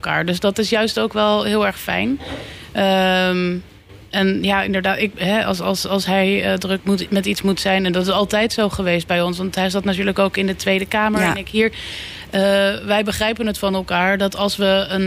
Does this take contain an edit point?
no; 0 cuts

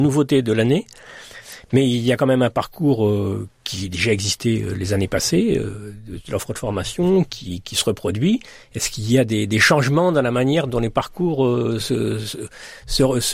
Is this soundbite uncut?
yes; 0 cuts

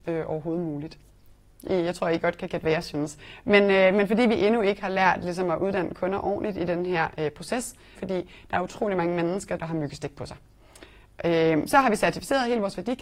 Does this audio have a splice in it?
yes; 2 cuts; at 8.0 s, 9.6 s

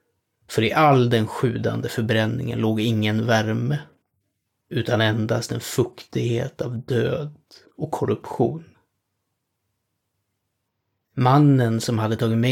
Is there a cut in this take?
no; 0 cuts

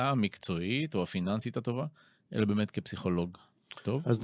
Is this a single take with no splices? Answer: yes; 0 cuts

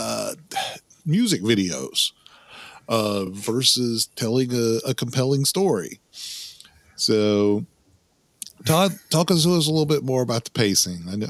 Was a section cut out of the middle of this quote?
no; 0 cuts

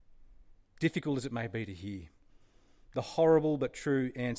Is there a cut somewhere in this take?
no; 0 cuts

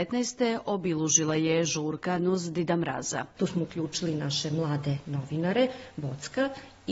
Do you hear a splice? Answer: yes; 1 cut; at 3.4 s

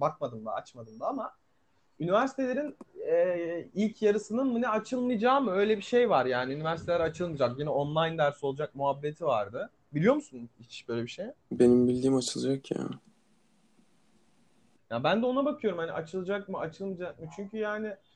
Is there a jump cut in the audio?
no; 0 cuts

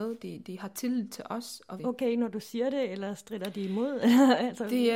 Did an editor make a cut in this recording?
yes; 1 cut; at 1.8 s

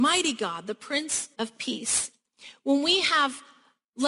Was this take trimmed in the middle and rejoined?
yes; 1 cut; at 1.3 s

